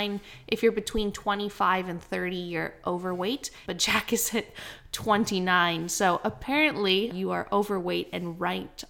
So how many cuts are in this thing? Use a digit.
2